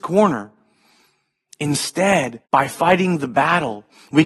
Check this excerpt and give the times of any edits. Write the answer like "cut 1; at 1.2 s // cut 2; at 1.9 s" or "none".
cut 1; at 2.4 s